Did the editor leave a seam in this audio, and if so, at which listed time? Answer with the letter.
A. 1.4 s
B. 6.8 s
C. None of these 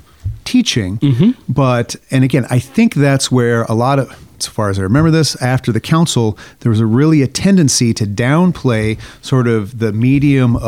C